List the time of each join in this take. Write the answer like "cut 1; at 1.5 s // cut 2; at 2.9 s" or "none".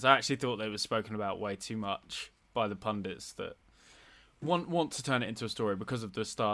none